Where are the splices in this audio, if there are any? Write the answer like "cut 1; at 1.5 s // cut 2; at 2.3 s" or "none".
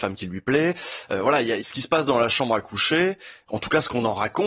none